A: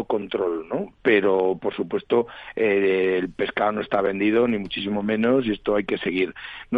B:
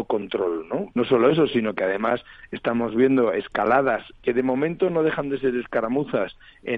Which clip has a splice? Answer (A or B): B